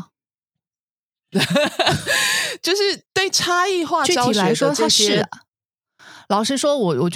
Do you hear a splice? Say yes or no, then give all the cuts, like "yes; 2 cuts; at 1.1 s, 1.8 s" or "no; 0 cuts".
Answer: yes; 1 cut; at 3.1 s